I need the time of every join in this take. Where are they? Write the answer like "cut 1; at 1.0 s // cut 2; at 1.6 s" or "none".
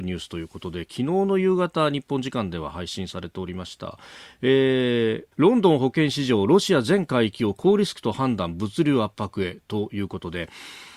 cut 1; at 5.3 s